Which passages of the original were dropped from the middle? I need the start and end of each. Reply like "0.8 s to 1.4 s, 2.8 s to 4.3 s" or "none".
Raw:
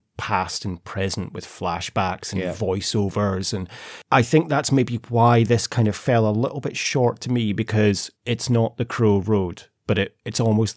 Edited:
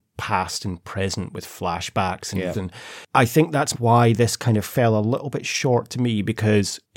2.5 s to 3.5 s, 4.7 s to 5.0 s